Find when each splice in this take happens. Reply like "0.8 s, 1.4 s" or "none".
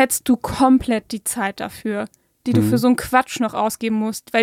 none